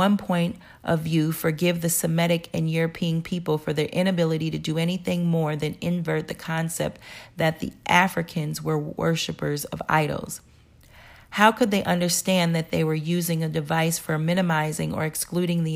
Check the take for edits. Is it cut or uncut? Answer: uncut